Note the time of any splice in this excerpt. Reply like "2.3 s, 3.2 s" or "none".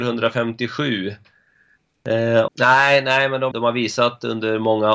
2.5 s, 3.5 s

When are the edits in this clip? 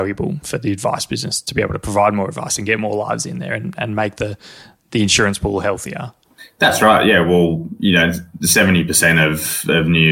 none

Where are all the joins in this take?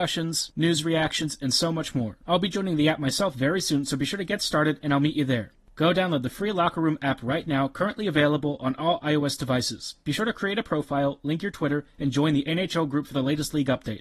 2.2 s

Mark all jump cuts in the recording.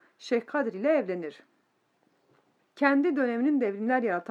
none

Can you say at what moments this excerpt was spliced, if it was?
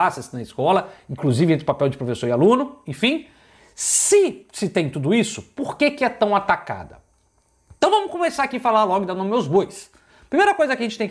none

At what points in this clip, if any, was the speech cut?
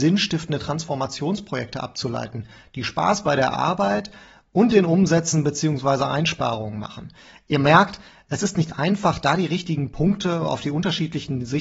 none

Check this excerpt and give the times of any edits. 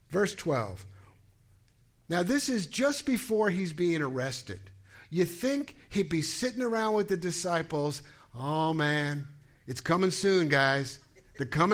none

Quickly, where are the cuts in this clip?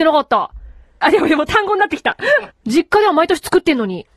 1.0 s, 2.5 s

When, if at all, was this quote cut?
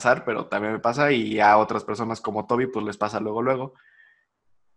none

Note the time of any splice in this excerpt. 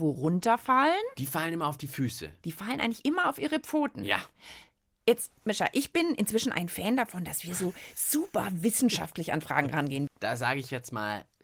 10.1 s

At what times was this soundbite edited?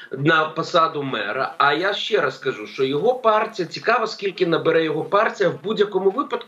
none

